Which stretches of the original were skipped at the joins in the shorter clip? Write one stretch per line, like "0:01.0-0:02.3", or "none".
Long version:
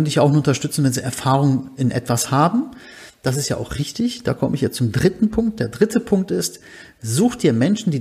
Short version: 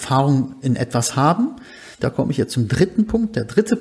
0:03.1-0:04.2